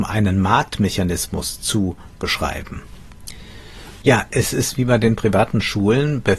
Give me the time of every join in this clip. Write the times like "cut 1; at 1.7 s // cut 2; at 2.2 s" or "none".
cut 1; at 4.0 s